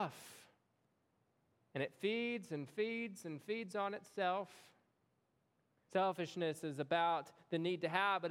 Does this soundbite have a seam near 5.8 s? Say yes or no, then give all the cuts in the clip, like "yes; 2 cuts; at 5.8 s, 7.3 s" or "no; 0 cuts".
yes; 1 cut; at 5.8 s